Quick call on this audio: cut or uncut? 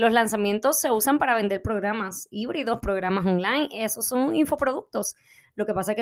uncut